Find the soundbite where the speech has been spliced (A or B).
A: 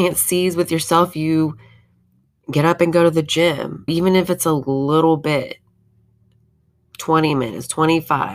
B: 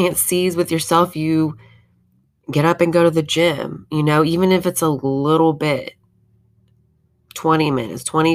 A